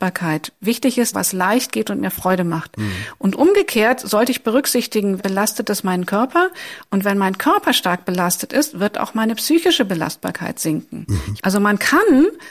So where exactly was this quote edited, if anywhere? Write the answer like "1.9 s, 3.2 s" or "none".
1.1 s, 5.2 s, 11.4 s